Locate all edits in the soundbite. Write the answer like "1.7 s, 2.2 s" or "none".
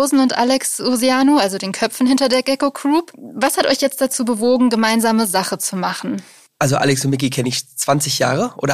none